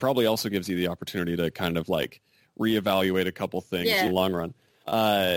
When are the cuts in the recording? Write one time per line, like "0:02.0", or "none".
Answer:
0:04.1